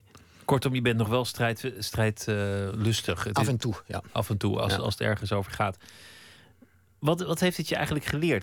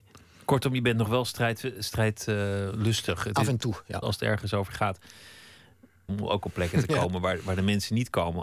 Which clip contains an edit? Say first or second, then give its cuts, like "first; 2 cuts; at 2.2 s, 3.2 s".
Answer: second; 2 cuts; at 4.0 s, 6.1 s